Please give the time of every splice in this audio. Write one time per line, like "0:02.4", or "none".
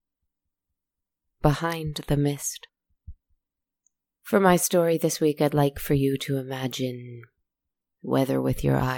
none